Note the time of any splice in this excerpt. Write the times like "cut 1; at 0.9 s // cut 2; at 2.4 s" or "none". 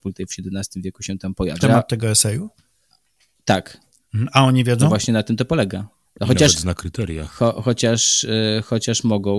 cut 1; at 1.6 s // cut 2; at 6.1 s

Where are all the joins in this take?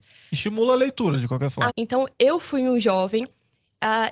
cut 1; at 1.7 s

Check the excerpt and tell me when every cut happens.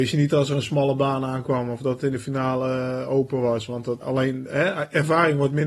cut 1; at 4.0 s

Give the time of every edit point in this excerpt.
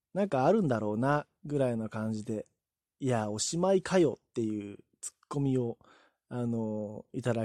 none

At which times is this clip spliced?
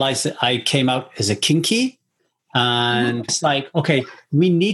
cut 1; at 3.3 s

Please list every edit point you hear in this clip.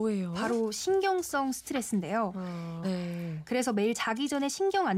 cut 1; at 2.8 s

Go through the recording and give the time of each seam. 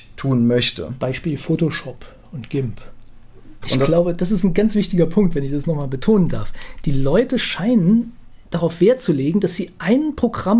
cut 1; at 3.6 s

